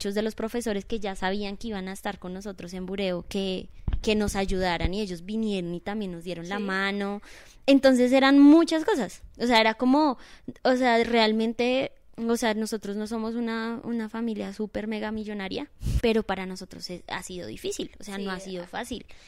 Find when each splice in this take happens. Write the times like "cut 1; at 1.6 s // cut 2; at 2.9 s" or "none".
cut 1; at 16.0 s